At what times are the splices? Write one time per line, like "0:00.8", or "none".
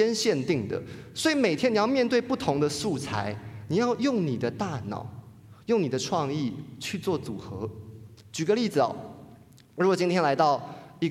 none